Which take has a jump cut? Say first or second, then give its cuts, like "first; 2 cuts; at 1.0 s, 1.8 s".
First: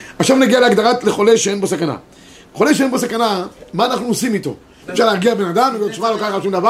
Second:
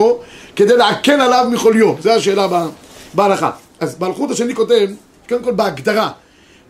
first; 1 cut; at 4.8 s